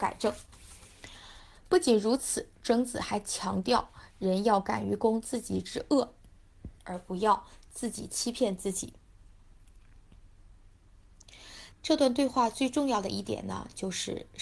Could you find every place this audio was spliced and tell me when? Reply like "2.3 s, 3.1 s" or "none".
6.8 s, 11.7 s